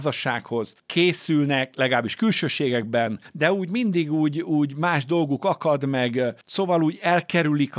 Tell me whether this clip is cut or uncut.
uncut